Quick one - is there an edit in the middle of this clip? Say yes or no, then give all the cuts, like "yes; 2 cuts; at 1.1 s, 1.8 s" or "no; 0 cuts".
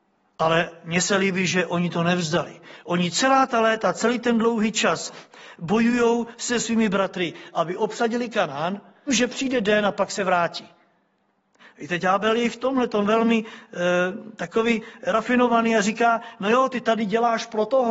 yes; 2 cuts; at 9.1 s, 11.6 s